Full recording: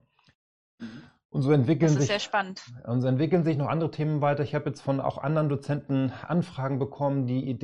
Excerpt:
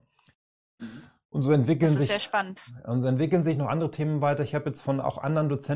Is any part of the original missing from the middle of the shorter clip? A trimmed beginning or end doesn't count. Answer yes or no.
no